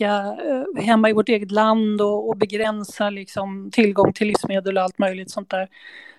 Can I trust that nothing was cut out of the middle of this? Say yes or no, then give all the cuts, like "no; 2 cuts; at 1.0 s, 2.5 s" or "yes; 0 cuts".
yes; 0 cuts